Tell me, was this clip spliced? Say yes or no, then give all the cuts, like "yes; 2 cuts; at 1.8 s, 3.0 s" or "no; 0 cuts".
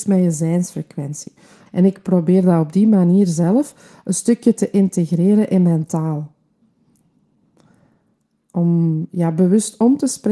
yes; 1 cut; at 1.7 s